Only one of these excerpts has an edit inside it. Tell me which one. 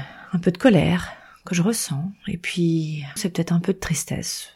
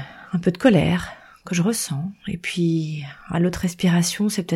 first; 1 cut; at 3.2 s

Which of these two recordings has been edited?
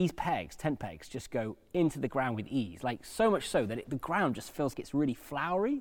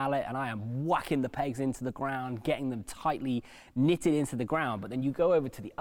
first; 1 cut; at 4.7 s

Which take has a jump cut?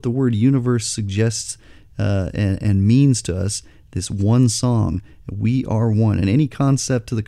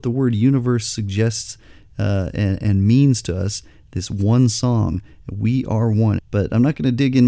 second; 1 cut; at 6.2 s

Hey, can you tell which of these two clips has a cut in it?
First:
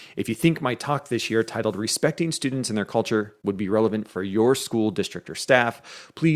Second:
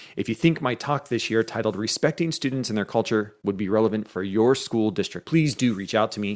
second; 1 cut; at 5.2 s

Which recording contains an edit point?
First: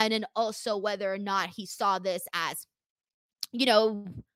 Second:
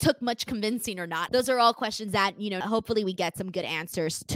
second; 2 cuts; at 1.3 s, 2.6 s

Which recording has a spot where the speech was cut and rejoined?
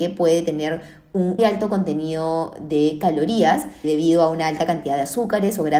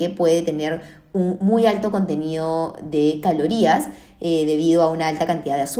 first; 2 cuts; at 1.4 s, 3.8 s

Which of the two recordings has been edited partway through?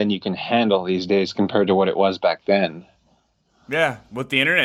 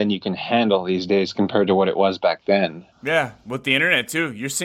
second; 1 cut; at 2.9 s

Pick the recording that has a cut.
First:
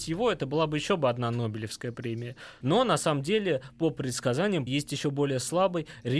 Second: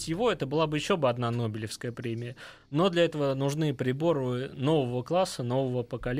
first; 2 cuts; at 2.6 s, 4.7 s

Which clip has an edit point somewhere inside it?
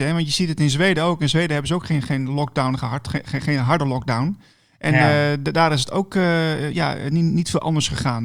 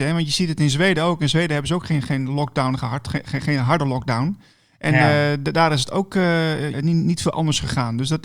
second; 1 cut; at 6.7 s

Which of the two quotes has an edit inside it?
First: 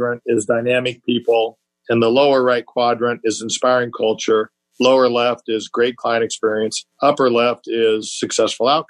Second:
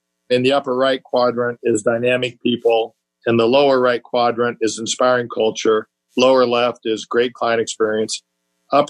first; 1 cut; at 6.9 s

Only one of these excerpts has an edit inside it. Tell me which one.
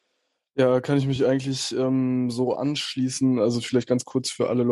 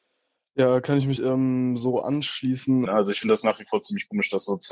second; 2 cuts; at 1.2 s, 2.9 s

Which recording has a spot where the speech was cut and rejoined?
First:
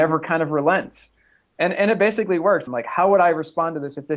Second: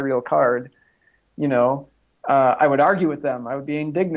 first; 1 cut; at 2.7 s

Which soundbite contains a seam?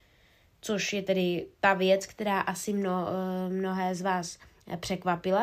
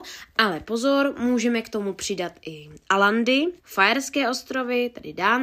second; 1 cut; at 3.6 s

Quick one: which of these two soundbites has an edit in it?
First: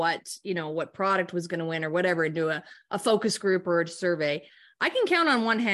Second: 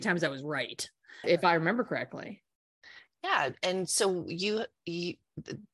second; 1 cut; at 1.2 s

